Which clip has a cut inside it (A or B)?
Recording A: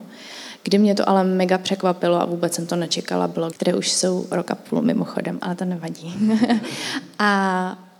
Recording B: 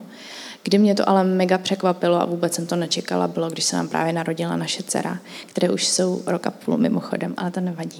A